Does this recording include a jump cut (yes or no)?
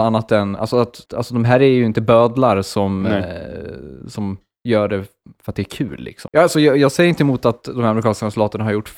yes